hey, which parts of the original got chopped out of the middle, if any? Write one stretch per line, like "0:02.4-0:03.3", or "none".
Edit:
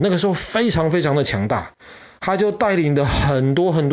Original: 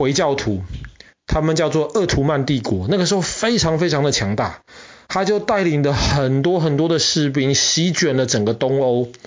none